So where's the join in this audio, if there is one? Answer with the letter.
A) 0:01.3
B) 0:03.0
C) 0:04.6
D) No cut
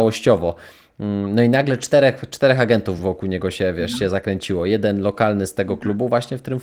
B